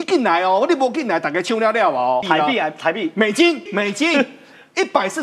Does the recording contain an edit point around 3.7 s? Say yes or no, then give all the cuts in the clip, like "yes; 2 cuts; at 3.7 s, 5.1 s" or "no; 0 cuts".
yes; 2 cuts; at 2.2 s, 3.7 s